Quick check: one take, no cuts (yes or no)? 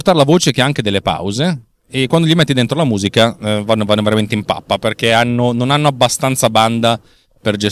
yes